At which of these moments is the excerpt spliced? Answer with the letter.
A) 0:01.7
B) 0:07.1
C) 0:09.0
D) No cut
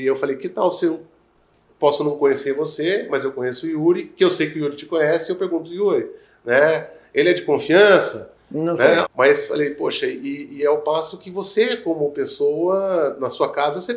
C